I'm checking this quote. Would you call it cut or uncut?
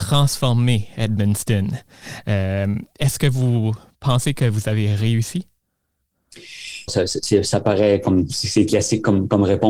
cut